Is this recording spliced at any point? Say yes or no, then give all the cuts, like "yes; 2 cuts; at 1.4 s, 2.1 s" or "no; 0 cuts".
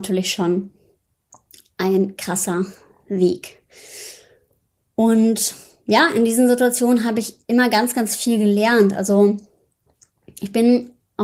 no; 0 cuts